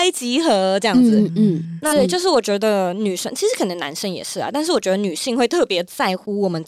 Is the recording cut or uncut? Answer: cut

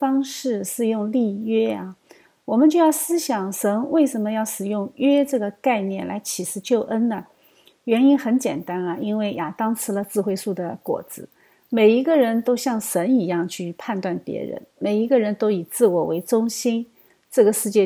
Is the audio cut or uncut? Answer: uncut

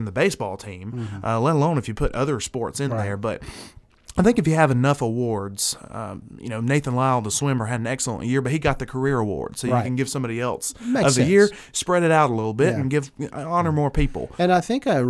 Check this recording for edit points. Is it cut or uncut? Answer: uncut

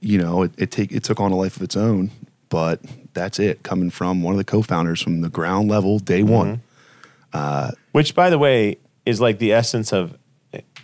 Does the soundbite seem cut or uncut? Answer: cut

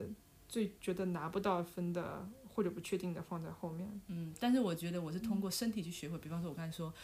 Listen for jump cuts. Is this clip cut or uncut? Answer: uncut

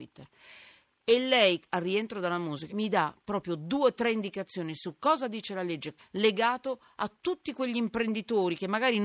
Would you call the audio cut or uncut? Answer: cut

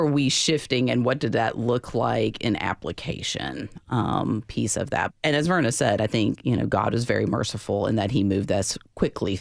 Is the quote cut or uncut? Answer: cut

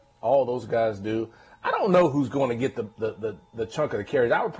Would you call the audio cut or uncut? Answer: uncut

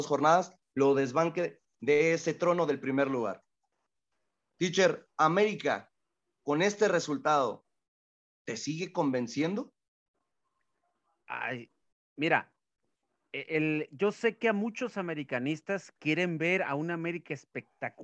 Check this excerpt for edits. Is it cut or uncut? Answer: uncut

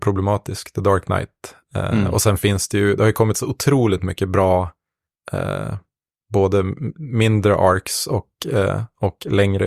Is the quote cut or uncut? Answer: uncut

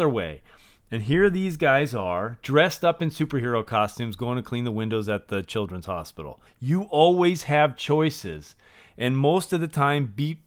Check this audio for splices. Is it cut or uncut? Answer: cut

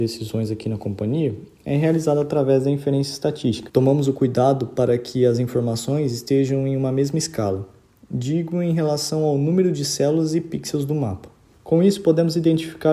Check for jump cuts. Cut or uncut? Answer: cut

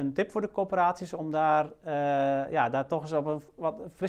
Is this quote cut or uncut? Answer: uncut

